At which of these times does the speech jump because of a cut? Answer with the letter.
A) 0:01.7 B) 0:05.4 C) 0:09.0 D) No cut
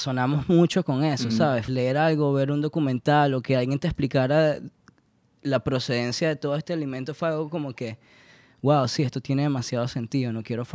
A